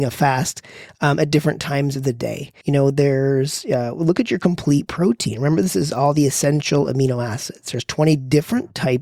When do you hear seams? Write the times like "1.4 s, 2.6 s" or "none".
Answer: 2.6 s